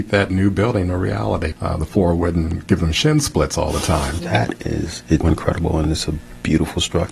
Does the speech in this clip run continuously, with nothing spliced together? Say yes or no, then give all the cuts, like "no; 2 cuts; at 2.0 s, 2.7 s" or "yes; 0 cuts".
no; 3 cuts; at 1.5 s, 4.2 s, 5.2 s